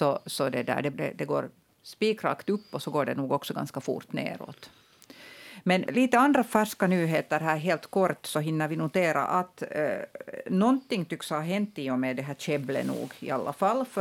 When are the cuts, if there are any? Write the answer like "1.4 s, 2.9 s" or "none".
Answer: 0.9 s, 5.9 s